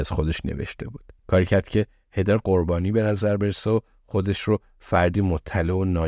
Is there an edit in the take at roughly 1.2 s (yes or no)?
yes